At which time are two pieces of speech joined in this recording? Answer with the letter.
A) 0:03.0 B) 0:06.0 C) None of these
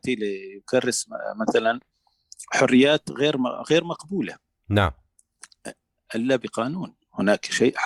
C